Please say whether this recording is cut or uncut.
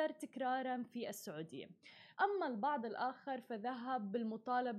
cut